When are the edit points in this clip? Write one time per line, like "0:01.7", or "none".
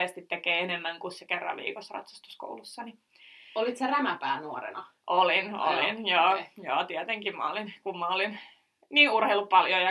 none